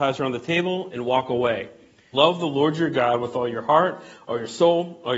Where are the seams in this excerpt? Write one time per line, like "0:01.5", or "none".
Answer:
0:02.1